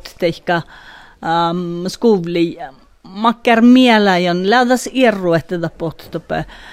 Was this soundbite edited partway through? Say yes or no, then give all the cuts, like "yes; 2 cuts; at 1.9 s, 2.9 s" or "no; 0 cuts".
no; 0 cuts